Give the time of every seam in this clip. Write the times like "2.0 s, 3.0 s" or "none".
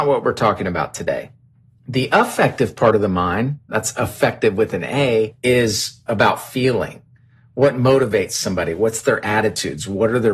5.4 s